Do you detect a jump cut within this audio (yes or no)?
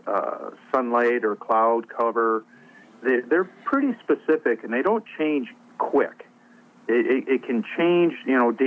no